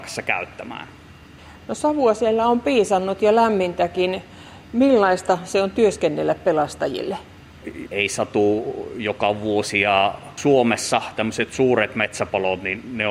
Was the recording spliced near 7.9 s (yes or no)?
yes